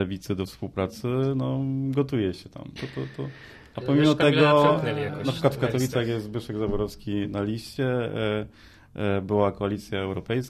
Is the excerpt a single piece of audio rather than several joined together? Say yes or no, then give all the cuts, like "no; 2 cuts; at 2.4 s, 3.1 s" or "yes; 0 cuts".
no; 1 cut; at 2.8 s